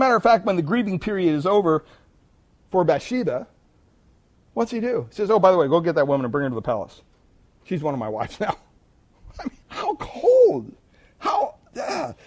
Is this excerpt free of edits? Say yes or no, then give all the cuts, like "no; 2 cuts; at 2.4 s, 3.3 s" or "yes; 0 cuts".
no; 2 cuts; at 4.3 s, 9.6 s